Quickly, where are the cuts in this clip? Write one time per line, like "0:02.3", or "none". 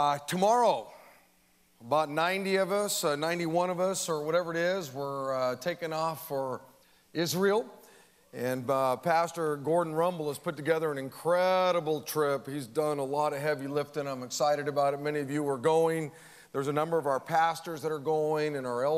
none